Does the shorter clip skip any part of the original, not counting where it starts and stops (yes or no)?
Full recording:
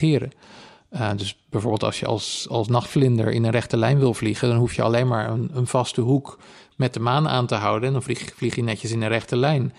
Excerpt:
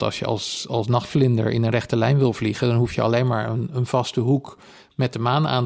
no